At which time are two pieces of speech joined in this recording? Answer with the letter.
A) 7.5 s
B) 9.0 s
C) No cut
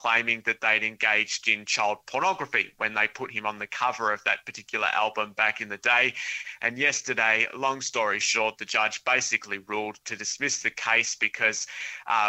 C